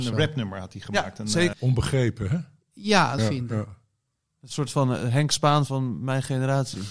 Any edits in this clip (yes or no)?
yes